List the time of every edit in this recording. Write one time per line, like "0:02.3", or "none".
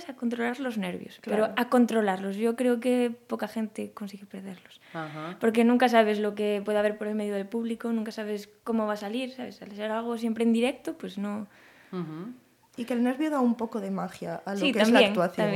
none